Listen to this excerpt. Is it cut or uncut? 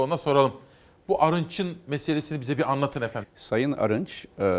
cut